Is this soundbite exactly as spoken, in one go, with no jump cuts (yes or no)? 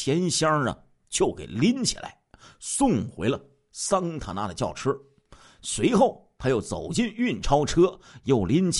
yes